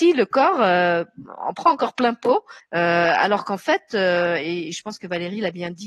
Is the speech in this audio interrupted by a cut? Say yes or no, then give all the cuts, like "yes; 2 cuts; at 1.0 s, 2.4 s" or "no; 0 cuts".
yes; 1 cut; at 2.6 s